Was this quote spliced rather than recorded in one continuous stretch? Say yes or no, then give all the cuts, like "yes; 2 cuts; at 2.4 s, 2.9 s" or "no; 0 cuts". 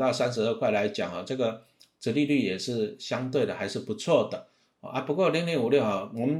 no; 0 cuts